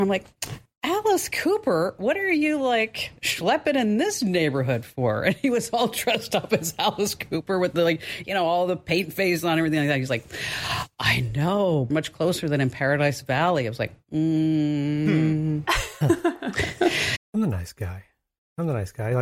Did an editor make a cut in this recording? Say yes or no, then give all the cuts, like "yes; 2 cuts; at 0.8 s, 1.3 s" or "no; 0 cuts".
yes; 2 cuts; at 11.9 s, 17.2 s